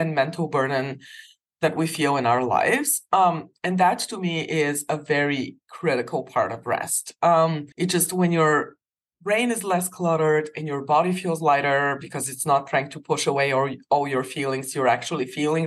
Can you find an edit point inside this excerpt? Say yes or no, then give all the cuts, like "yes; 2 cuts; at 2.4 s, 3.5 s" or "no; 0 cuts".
yes; 1 cut; at 7.7 s